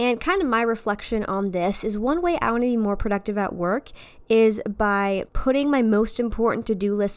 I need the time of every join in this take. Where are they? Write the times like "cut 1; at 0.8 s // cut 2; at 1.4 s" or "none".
cut 1; at 5.3 s